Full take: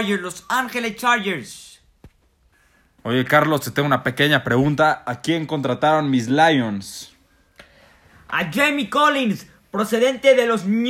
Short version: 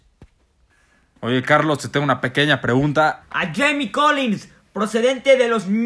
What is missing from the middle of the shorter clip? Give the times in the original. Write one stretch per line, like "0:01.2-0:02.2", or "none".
0:05.0-0:08.2